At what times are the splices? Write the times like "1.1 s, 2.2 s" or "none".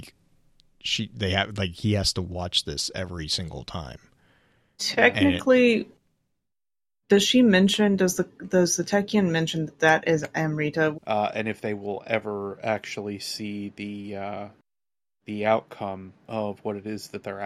10.9 s